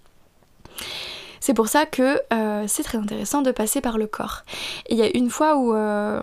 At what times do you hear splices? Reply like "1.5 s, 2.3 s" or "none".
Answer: none